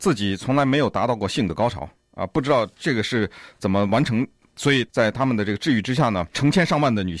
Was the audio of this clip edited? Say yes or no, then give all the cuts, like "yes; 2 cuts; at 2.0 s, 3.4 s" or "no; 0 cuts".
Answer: no; 0 cuts